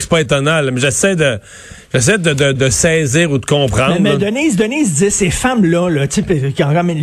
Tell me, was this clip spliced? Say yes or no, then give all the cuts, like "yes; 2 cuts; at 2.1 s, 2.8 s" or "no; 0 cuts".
yes; 1 cut; at 2.6 s